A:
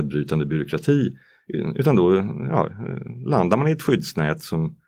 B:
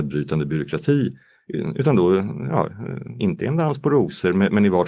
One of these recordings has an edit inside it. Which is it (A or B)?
B